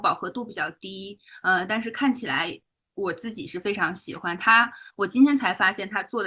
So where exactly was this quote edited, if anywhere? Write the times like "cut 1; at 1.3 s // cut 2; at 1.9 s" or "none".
none